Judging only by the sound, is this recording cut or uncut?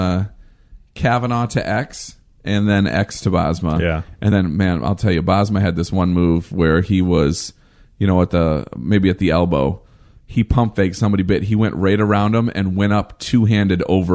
uncut